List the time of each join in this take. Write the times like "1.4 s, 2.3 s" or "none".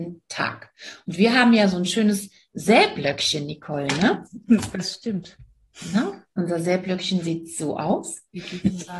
none